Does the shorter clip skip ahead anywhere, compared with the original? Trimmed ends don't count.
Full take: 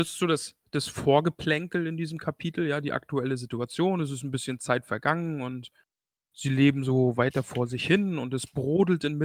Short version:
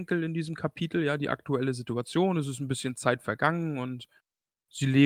no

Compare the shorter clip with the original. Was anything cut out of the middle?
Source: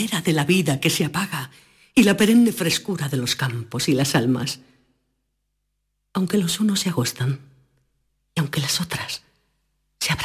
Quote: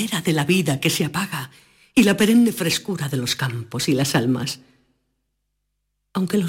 no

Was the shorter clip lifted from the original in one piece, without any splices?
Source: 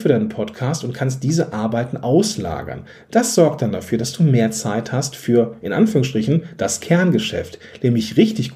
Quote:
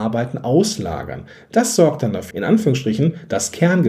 no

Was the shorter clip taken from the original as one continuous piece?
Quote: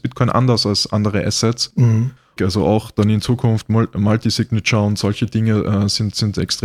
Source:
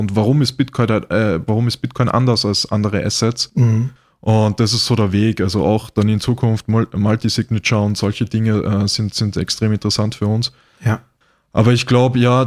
no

